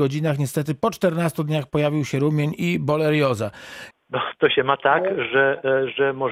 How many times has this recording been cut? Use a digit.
1